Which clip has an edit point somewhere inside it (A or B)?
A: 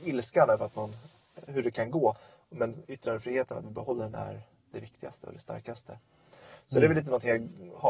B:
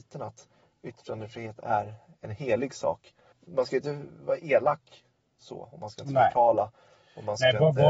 A